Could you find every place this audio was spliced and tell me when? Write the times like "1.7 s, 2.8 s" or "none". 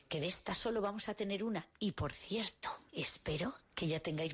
none